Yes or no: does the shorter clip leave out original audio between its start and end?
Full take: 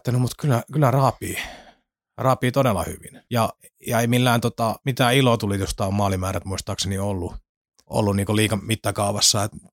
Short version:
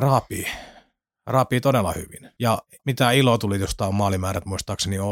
yes